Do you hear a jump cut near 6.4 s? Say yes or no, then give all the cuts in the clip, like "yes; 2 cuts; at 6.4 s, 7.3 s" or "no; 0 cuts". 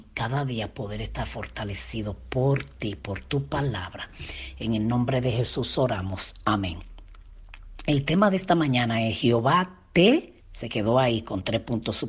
no; 1 cut; at 10.4 s